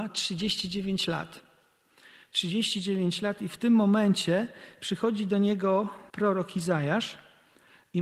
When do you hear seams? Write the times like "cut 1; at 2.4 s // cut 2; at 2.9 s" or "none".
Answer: cut 1; at 6.1 s